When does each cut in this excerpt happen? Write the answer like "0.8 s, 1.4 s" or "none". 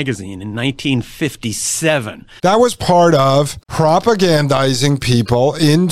2.4 s, 3.6 s